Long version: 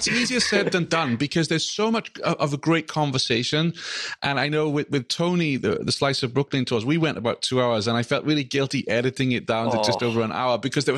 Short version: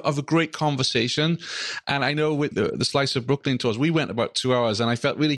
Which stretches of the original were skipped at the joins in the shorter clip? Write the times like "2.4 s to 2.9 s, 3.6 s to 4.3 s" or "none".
4.9 s to 5.6 s

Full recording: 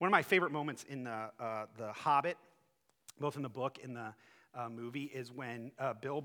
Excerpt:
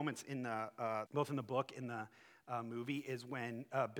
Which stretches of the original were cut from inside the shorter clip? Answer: 1.7 s to 3.1 s

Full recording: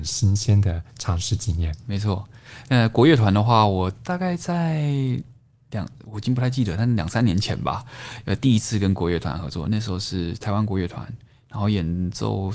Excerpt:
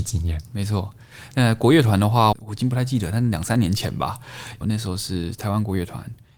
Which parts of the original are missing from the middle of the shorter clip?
3.7 s to 6.0 s, 8.3 s to 9.6 s

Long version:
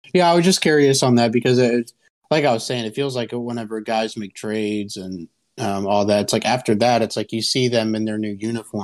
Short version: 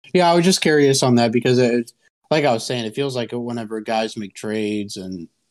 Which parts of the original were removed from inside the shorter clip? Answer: none

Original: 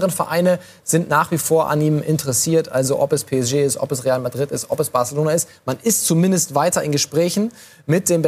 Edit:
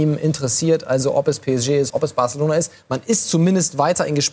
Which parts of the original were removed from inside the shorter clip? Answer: 3.7 s to 4.7 s

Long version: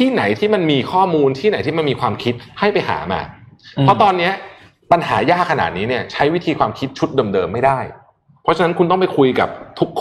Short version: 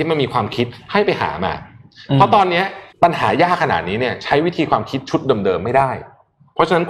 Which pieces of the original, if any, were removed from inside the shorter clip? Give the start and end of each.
4.6 s to 4.8 s

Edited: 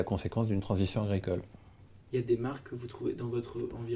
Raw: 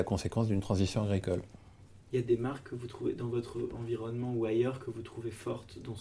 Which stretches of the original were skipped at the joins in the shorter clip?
none

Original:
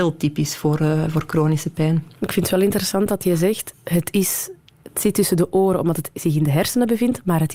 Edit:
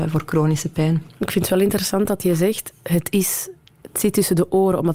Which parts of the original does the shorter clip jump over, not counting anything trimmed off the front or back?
none

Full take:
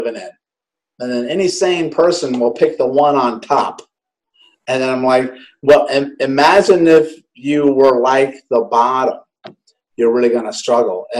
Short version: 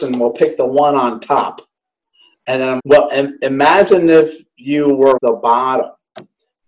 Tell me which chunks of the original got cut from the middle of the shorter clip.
5.0 s to 5.6 s, 7.9 s to 8.4 s

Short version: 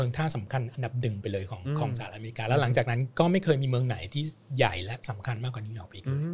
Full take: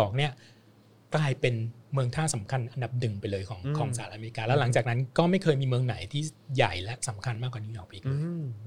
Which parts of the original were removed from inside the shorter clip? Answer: none

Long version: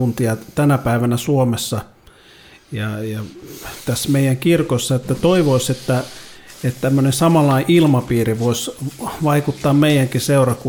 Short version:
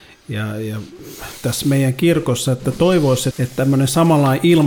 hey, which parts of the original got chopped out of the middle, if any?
5.7 s to 6.6 s

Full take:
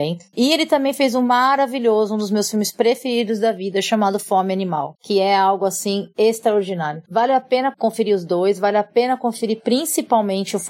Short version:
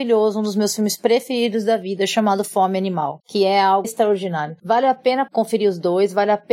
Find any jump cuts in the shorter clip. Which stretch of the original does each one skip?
5.6 s to 6.3 s

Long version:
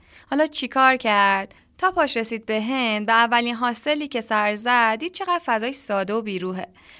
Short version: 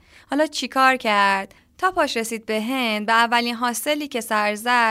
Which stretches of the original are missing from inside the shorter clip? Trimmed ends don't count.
none

